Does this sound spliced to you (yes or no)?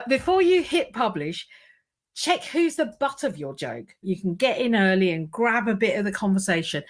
yes